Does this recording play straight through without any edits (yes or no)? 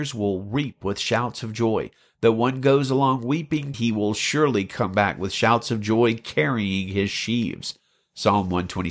no